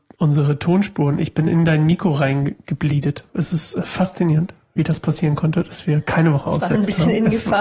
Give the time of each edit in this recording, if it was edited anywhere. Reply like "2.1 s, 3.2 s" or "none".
3.3 s, 6.7 s